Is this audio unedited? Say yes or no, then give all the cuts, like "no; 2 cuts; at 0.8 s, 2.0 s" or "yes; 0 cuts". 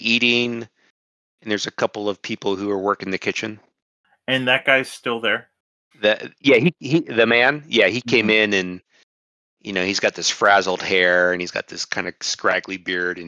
no; 1 cut; at 5.9 s